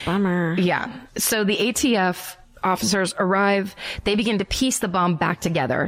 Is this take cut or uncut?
uncut